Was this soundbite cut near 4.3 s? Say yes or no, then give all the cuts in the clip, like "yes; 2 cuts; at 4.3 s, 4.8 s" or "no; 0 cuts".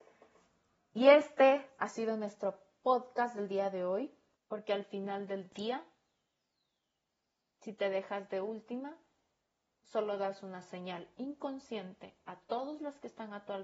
yes; 1 cut; at 4.3 s